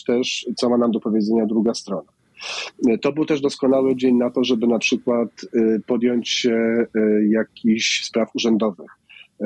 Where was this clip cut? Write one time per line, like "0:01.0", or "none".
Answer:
none